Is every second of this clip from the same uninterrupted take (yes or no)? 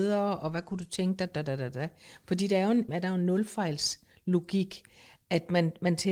no